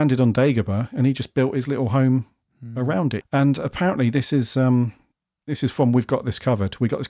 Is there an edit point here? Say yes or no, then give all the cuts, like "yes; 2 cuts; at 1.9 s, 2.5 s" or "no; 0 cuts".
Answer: yes; 1 cut; at 3.2 s